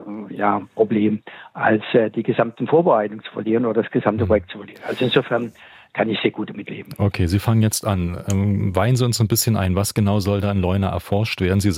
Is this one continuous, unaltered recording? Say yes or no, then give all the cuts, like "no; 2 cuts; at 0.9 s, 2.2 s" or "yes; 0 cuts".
yes; 0 cuts